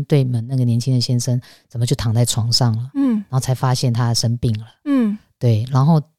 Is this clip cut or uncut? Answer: uncut